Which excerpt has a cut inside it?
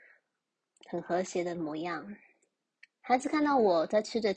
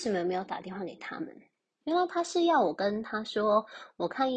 second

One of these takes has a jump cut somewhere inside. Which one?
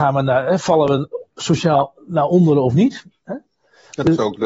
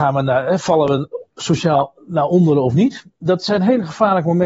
first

